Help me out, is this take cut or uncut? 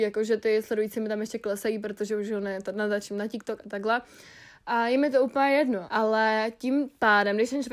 cut